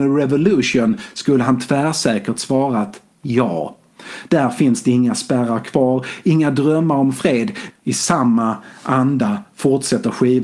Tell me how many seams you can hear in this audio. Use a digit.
2